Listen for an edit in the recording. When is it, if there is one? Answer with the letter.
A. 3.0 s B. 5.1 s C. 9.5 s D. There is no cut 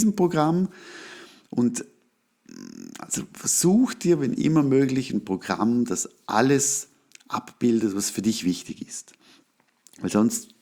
D